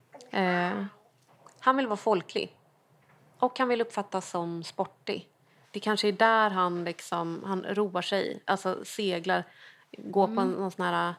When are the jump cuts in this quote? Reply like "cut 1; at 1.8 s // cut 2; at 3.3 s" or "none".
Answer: cut 1; at 5.6 s